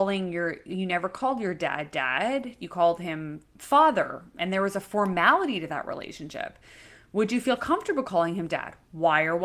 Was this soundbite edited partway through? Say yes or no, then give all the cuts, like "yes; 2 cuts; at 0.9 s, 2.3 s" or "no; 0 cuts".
no; 0 cuts